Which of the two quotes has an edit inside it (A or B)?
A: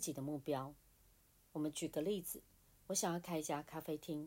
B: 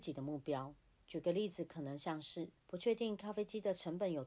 B